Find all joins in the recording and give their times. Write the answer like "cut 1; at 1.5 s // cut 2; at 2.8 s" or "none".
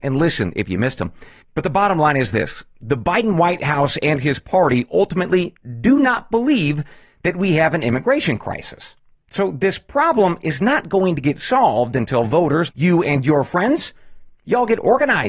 cut 1; at 1.4 s // cut 2; at 9.1 s // cut 3; at 12.7 s